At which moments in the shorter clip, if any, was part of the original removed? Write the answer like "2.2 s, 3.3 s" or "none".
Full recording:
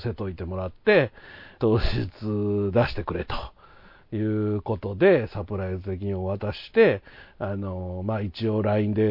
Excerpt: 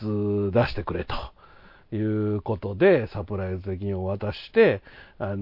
none